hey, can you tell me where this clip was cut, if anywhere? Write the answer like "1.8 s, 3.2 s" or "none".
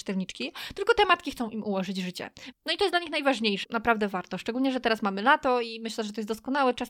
2.5 s, 3.6 s